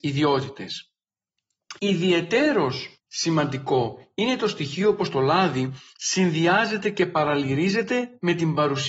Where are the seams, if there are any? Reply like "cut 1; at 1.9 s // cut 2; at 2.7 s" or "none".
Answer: cut 1; at 1.8 s // cut 2; at 3.0 s